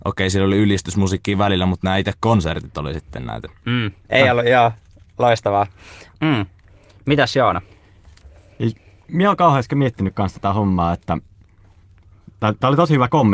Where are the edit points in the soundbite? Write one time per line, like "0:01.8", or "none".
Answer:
0:04.1
0:06.1